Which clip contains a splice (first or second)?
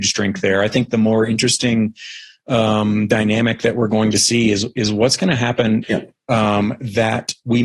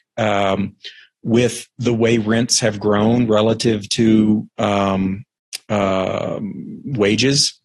first